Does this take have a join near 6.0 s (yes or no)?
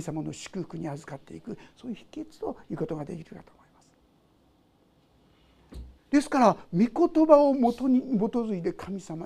yes